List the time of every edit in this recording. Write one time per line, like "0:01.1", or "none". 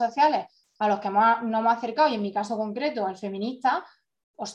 none